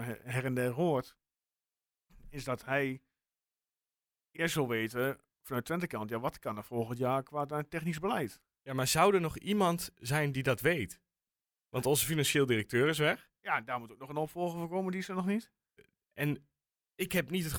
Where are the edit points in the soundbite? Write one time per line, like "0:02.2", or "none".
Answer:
none